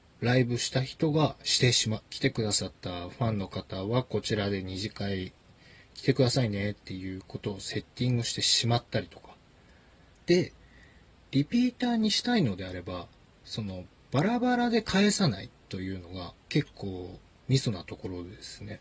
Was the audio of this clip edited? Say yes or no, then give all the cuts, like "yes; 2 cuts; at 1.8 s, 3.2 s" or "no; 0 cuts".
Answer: yes; 3 cuts; at 2.0 s, 10.1 s, 16.4 s